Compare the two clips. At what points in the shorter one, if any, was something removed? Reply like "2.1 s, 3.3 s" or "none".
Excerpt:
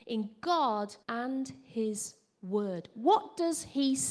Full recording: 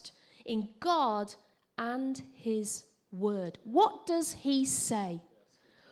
1.0 s

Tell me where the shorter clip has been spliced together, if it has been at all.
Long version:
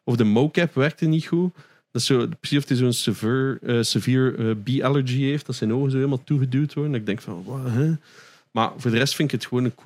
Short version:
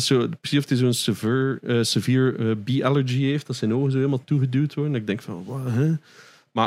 none

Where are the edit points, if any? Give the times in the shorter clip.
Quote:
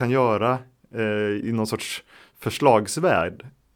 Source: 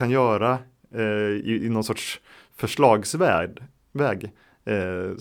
1.4 s

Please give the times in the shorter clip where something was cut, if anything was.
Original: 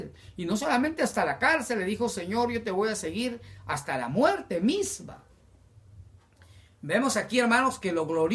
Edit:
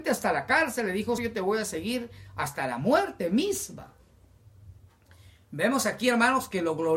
1.2 s

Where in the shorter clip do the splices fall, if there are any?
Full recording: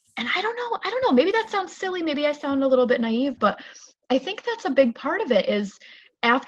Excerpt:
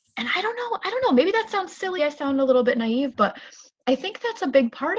2.0 s

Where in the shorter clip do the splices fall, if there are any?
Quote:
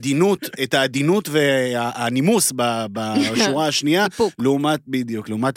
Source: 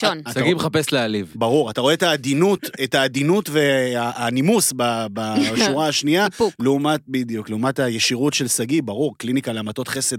none

